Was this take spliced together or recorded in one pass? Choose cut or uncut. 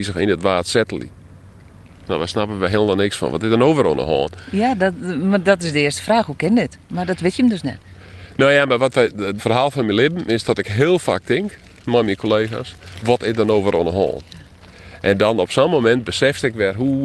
cut